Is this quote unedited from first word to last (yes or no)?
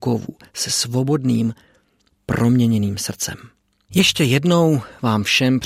no